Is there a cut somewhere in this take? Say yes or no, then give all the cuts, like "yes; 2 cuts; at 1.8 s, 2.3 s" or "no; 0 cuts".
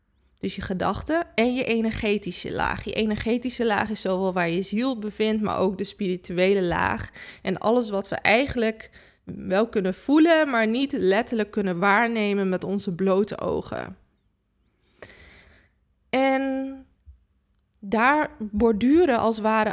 no; 0 cuts